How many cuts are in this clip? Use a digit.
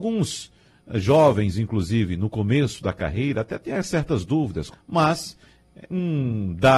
1